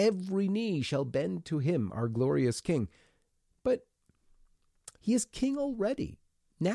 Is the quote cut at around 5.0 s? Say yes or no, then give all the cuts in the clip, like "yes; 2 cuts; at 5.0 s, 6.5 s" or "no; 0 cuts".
yes; 1 cut; at 5.0 s